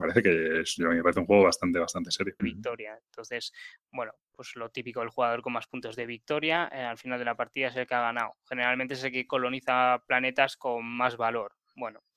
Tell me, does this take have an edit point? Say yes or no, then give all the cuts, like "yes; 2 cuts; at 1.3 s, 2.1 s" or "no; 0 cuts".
yes; 1 cut; at 2.4 s